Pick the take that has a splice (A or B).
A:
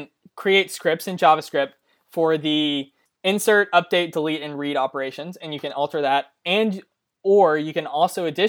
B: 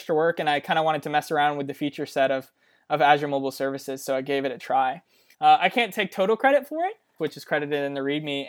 B